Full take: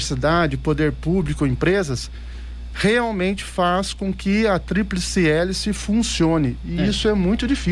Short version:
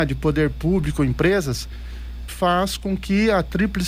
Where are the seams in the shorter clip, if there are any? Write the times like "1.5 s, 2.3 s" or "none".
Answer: 2.3 s